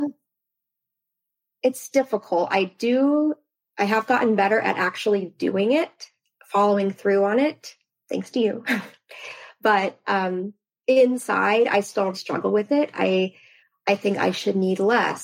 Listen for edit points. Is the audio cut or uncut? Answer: cut